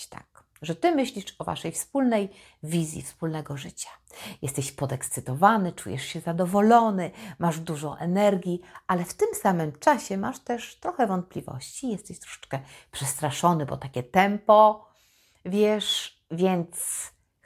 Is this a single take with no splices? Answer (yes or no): yes